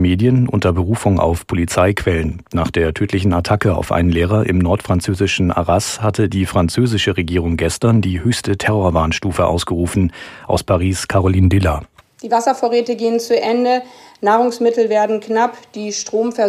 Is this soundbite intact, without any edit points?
no; 1 cut; at 12.0 s

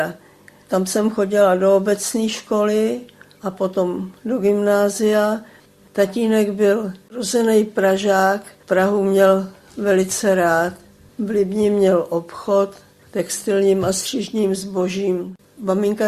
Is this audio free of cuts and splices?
yes; 0 cuts

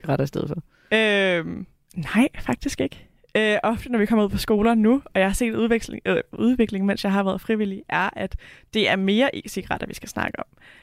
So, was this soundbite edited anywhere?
no; 0 cuts

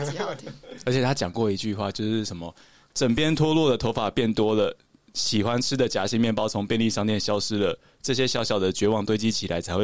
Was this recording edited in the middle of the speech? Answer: no; 0 cuts

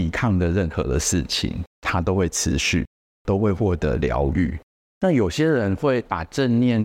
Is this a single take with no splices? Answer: no; 3 cuts; at 1.7 s, 3.1 s, 4.9 s

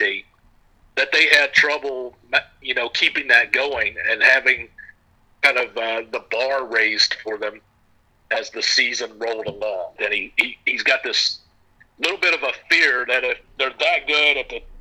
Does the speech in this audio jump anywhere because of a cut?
yes; 2 cuts; at 10.0 s, 13.4 s

